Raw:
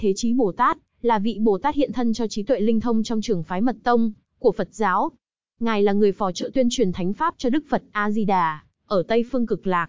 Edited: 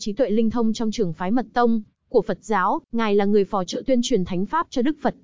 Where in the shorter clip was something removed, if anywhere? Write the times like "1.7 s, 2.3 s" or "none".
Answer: 2.8 s